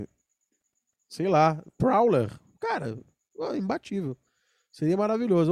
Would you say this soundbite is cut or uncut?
uncut